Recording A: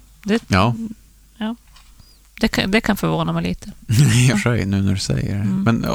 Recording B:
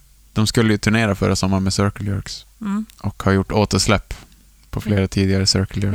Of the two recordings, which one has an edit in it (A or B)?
A